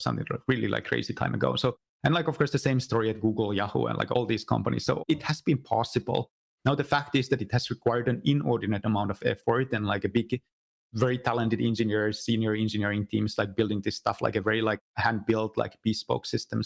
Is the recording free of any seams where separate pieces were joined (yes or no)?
yes